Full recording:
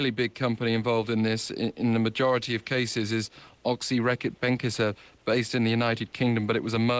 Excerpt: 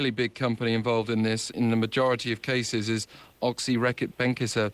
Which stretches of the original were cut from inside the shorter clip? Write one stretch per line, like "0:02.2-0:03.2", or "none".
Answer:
0:01.5-0:01.7